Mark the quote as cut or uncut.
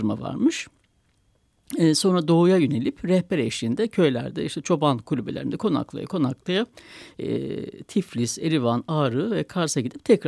uncut